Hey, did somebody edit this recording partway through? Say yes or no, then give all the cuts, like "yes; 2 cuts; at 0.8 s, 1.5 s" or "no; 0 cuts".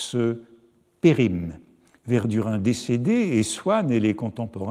yes; 1 cut; at 2.0 s